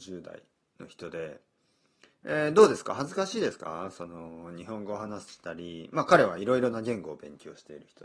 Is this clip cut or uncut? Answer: uncut